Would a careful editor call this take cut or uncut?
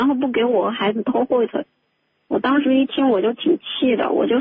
uncut